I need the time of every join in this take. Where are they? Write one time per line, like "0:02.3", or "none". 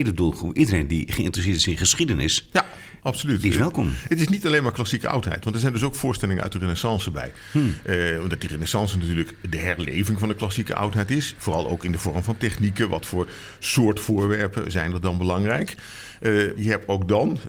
0:16.6